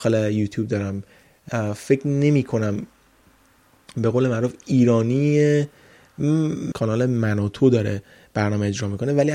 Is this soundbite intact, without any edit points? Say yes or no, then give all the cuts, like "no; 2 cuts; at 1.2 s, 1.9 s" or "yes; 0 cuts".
no; 2 cuts; at 1.5 s, 6.7 s